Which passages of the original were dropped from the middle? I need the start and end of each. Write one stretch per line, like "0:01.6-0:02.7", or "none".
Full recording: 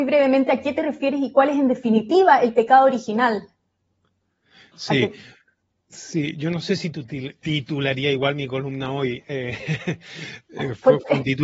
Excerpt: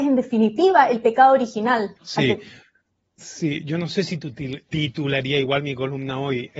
0:03.5-0:04.7